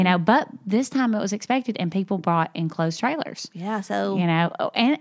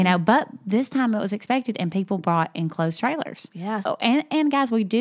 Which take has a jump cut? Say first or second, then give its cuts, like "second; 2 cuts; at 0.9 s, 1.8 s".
second; 1 cut; at 3.8 s